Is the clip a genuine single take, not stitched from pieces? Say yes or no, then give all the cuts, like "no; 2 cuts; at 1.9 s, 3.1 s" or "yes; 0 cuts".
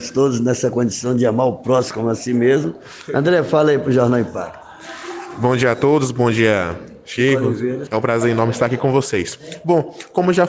no; 1 cut; at 7.9 s